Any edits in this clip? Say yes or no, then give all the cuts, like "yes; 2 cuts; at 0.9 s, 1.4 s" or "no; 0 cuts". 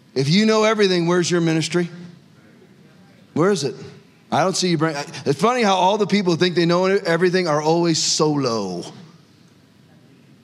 no; 0 cuts